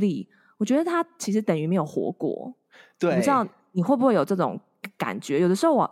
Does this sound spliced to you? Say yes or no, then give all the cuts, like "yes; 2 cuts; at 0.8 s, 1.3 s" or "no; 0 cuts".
no; 0 cuts